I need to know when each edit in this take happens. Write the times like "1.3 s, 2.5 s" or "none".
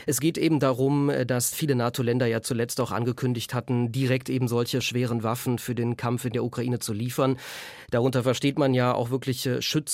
none

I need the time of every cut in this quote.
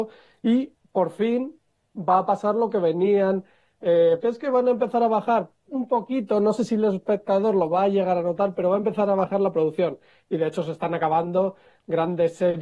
4.2 s

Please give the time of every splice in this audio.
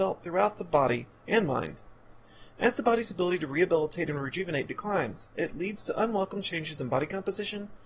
none

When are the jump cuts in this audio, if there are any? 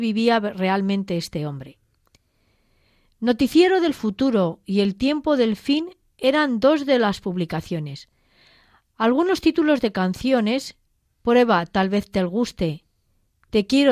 none

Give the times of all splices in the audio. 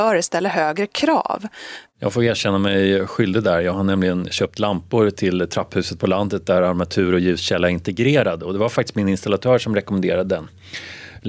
1.9 s

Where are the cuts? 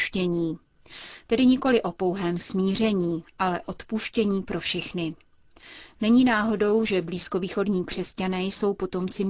none

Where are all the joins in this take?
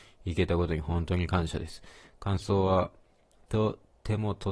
none

